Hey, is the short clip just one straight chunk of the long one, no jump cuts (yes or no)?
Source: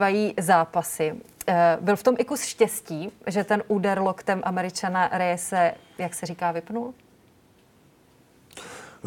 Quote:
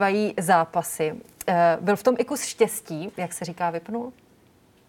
no